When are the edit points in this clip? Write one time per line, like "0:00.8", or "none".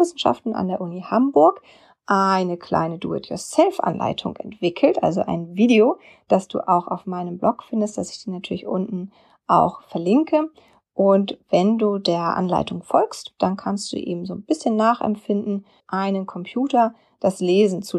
0:15.8